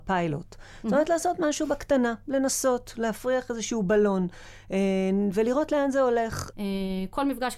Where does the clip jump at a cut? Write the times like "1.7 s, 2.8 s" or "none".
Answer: 6.5 s